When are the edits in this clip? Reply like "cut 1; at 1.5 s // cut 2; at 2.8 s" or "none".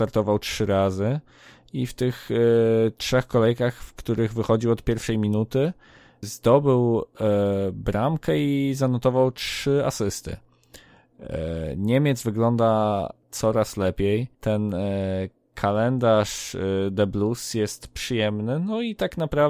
cut 1; at 6.2 s // cut 2; at 14.3 s